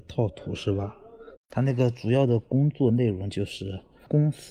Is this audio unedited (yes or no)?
no